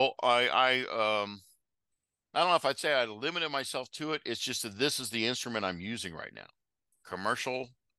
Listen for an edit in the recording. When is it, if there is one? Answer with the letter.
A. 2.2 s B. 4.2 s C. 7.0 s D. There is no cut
C